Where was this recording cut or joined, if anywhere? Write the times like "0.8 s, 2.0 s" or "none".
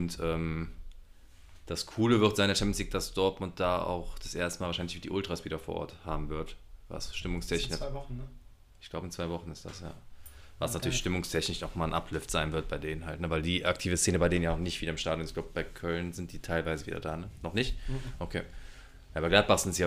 none